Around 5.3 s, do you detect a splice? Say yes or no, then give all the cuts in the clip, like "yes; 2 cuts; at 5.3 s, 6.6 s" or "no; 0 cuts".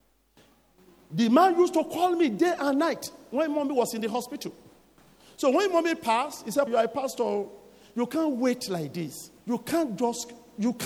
no; 2 cuts; at 6.7 s, 9.4 s